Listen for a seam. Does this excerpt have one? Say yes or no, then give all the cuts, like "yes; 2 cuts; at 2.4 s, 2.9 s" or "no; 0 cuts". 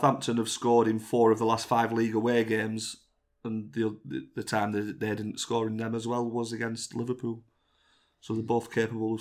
no; 0 cuts